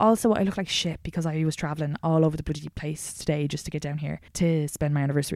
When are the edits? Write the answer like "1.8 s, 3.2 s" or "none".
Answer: 4.3 s